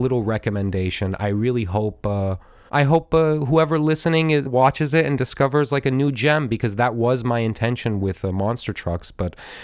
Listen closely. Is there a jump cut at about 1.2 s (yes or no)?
no